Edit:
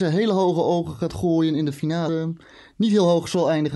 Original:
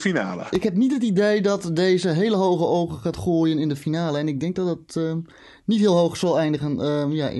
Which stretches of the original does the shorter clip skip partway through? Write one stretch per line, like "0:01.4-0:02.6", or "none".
0:04.1-0:05.0